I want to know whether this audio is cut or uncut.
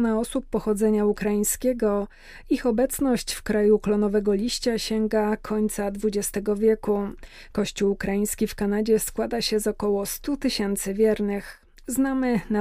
uncut